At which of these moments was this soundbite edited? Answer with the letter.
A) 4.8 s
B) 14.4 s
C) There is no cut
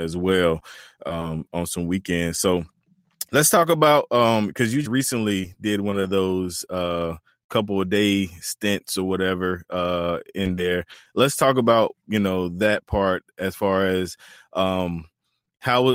A